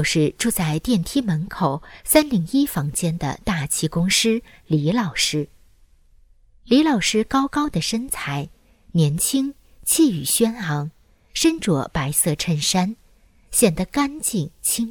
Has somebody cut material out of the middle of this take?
no; 0 cuts

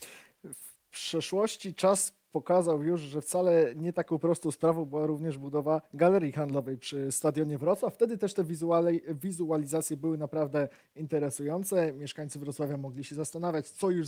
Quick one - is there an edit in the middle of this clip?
no; 0 cuts

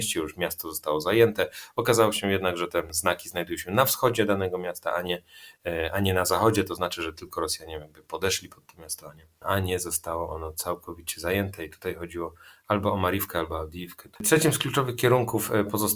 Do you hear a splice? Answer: no; 0 cuts

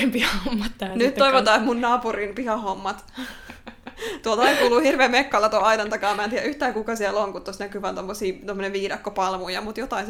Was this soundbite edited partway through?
no; 0 cuts

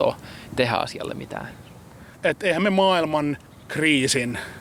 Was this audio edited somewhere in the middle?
yes; 1 cut; at 2.1 s

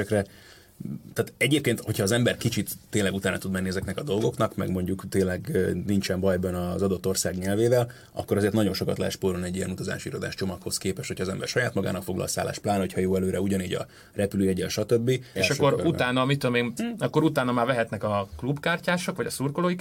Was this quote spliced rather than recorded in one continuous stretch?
yes; 2 cuts; at 15.4 s, 16.8 s

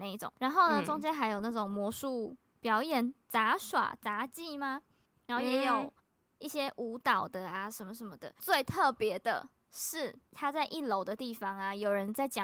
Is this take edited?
no; 0 cuts

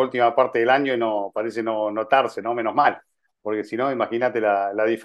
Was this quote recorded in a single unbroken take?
yes; 0 cuts

